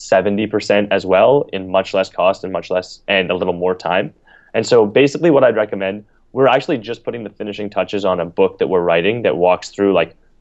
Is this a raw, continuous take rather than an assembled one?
yes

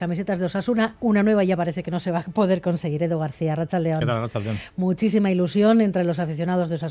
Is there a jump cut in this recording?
no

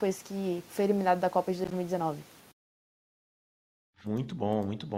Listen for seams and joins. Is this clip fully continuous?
yes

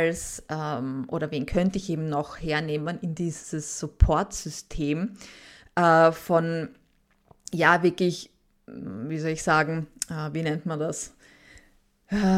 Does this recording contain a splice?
no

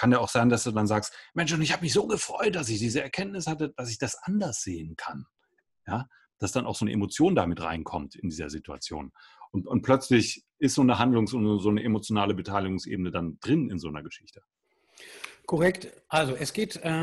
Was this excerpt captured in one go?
yes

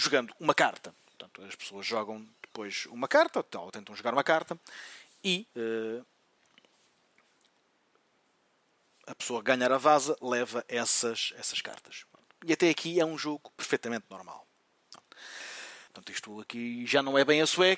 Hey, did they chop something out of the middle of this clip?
yes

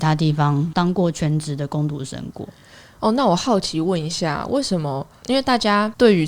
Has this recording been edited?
no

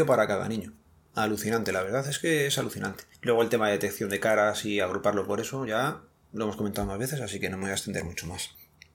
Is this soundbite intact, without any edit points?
yes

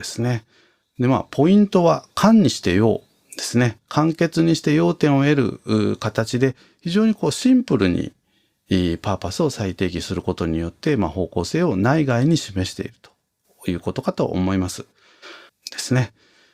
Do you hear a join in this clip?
yes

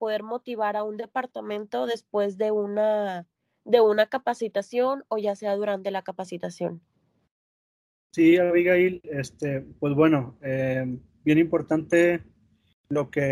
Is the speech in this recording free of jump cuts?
yes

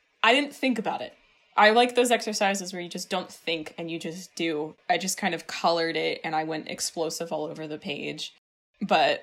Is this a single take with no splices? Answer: yes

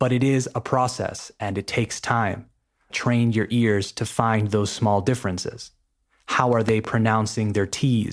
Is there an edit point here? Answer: yes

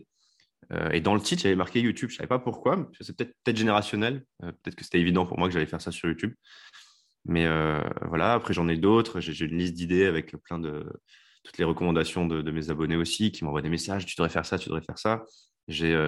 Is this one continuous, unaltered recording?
yes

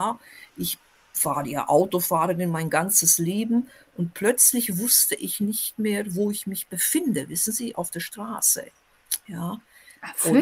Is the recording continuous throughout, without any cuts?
yes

